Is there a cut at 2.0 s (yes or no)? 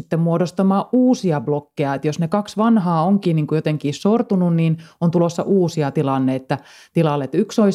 no